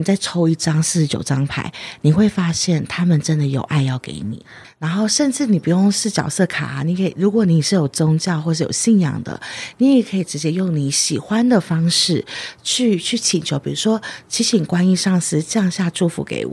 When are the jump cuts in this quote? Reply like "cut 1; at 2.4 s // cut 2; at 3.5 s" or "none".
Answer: none